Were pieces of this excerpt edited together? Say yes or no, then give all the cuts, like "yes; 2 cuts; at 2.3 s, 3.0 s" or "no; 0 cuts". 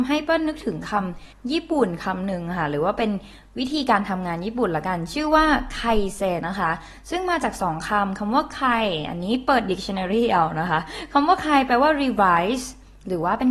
yes; 1 cut; at 6.4 s